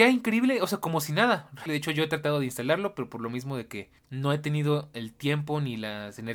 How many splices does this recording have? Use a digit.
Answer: 2